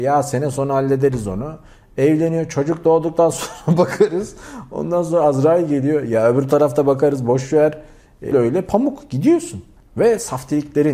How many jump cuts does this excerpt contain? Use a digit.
1